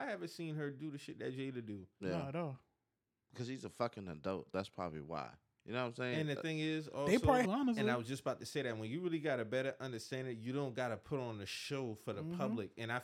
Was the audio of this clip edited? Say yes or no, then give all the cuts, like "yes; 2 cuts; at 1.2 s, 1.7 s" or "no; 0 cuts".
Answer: yes; 1 cut; at 7.4 s